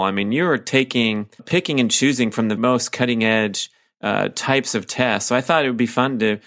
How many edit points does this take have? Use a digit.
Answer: 2